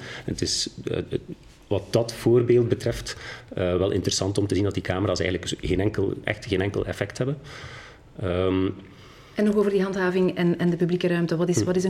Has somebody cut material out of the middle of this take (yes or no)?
no